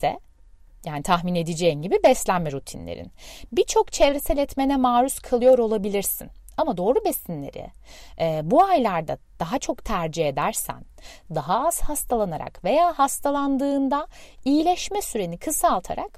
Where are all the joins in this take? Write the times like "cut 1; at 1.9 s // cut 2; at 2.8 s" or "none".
cut 1; at 11.3 s

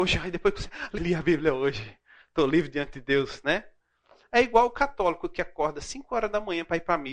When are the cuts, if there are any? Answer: cut 1; at 1.0 s

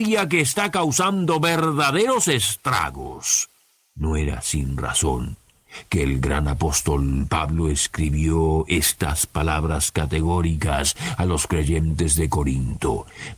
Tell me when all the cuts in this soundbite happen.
none

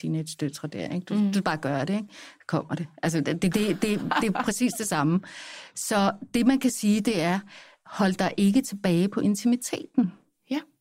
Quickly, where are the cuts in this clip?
cut 1; at 3.5 s

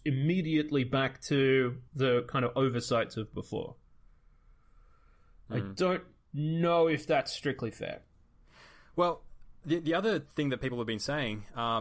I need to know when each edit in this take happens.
cut 1; at 1.9 s

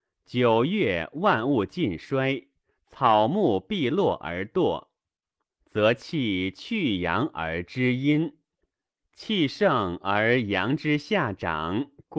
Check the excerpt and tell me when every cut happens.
none

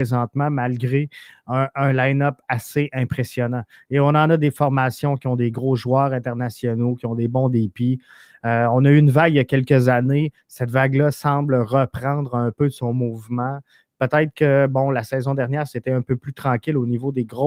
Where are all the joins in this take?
none

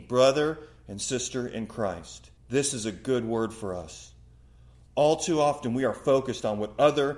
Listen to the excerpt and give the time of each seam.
cut 1; at 2.4 s

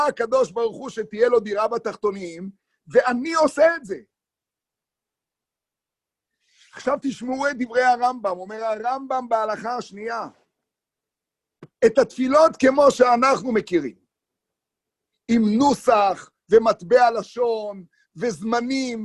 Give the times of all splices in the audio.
none

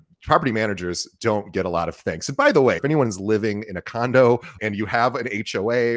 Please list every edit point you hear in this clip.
cut 1; at 2.8 s // cut 2; at 4.6 s

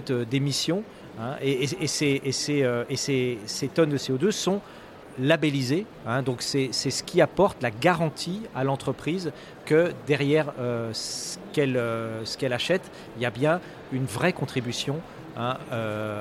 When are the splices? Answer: none

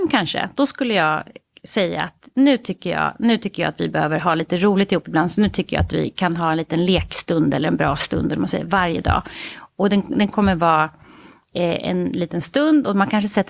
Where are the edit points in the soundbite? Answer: none

